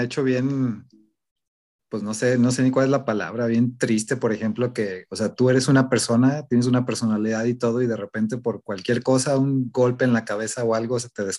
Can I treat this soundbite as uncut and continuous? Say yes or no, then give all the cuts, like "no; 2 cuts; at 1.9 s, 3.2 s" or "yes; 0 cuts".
yes; 0 cuts